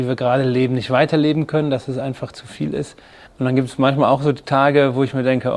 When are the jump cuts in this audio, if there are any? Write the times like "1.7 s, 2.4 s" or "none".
3.3 s